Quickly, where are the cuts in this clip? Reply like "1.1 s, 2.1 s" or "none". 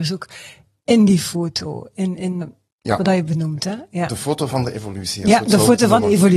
2.4 s